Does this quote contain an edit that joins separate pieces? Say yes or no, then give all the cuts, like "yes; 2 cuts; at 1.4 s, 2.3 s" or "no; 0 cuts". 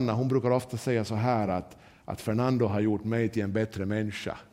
no; 0 cuts